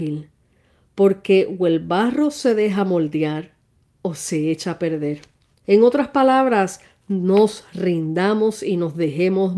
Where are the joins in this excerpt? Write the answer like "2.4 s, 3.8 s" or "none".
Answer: 5.6 s